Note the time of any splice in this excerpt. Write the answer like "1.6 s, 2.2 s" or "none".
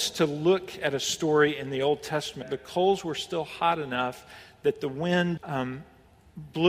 2.4 s, 5.4 s